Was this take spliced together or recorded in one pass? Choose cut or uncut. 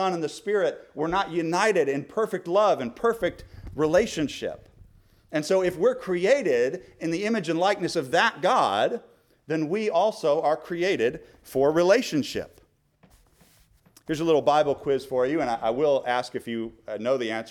uncut